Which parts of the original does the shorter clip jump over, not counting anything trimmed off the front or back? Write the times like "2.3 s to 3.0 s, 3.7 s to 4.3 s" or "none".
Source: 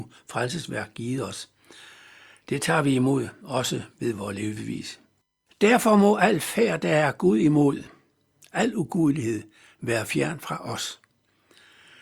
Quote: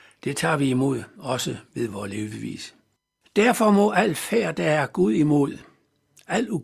none